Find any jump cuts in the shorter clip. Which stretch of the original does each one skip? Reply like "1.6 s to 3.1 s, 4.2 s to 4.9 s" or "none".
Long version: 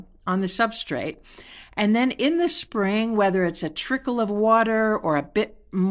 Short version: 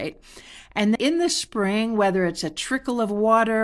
2.0 s to 2.1 s